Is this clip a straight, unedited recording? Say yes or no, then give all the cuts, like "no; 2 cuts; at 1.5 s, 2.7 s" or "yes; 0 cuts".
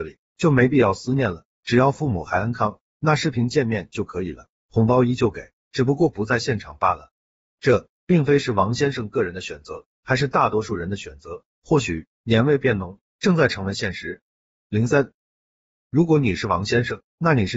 yes; 0 cuts